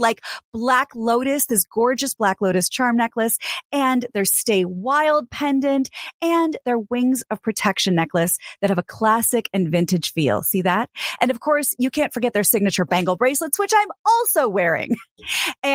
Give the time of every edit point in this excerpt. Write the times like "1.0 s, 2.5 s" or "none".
none